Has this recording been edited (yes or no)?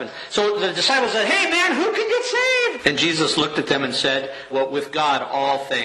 yes